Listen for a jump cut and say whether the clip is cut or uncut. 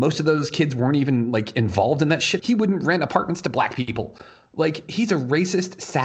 cut